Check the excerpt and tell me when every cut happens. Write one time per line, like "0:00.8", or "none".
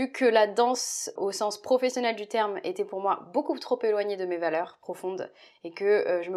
0:01.2